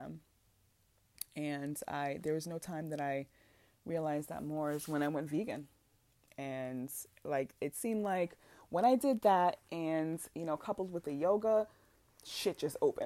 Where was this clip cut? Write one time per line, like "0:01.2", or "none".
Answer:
none

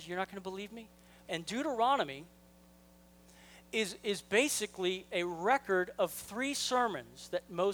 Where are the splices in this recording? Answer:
0:01.3

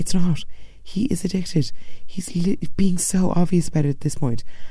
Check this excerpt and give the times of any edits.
none

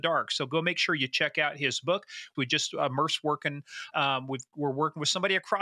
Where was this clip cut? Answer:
0:02.3
0:03.9

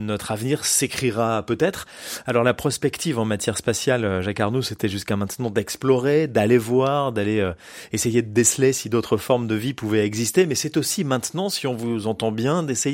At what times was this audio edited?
none

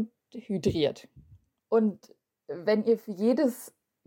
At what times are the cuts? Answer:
0:01.6

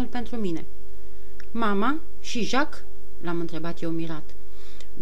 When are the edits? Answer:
none

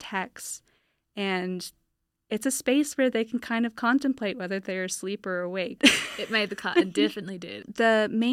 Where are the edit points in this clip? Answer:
0:05.8

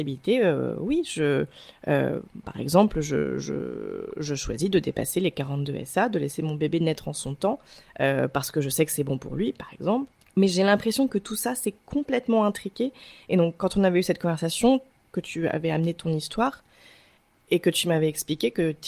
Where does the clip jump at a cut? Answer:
0:15.0

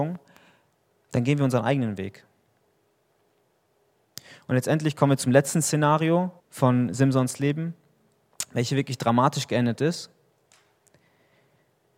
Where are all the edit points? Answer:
0:06.4

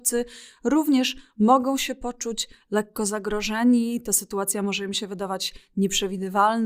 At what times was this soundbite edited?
none

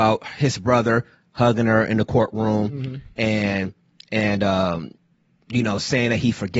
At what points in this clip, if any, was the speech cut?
none

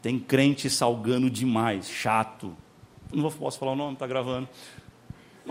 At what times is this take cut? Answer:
0:03.1

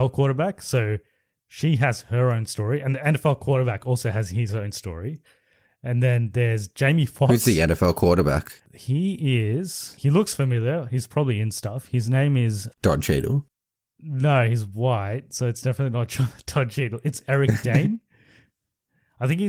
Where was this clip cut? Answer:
0:12.7

